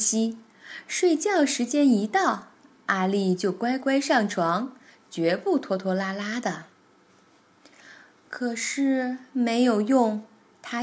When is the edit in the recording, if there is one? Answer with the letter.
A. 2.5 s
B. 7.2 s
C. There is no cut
C